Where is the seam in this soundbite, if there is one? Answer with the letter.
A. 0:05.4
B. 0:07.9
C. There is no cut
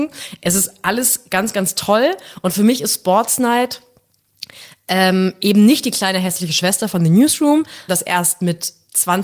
B